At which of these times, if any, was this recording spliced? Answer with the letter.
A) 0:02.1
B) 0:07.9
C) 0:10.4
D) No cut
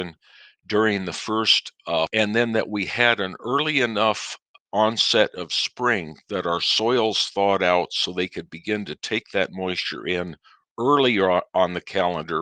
A